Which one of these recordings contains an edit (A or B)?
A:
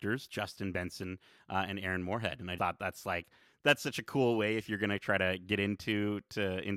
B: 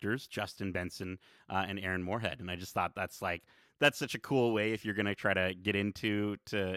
A